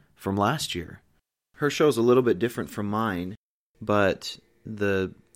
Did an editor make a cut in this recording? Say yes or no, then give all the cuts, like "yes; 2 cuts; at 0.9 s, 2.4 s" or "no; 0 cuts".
no; 0 cuts